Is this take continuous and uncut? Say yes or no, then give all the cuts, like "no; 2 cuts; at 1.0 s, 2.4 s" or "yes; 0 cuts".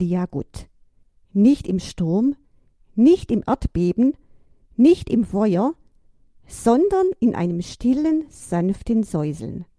yes; 0 cuts